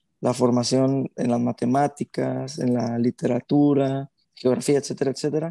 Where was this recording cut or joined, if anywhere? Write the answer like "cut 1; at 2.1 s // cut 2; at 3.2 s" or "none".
cut 1; at 4.2 s